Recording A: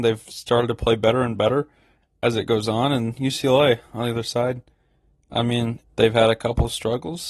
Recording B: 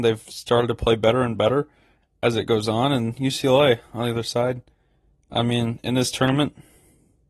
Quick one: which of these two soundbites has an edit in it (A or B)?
A